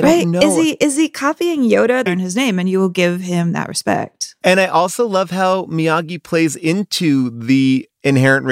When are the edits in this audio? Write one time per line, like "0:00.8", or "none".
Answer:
0:02.1